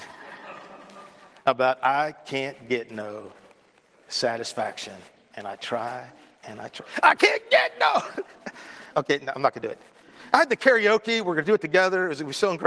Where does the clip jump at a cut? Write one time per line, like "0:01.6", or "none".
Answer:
0:08.9